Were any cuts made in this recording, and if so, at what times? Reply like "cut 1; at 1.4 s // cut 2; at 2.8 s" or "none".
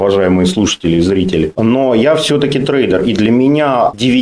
none